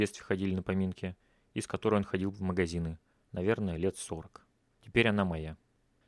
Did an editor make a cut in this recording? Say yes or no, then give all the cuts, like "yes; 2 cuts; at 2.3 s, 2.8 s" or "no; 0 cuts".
yes; 1 cut; at 3.2 s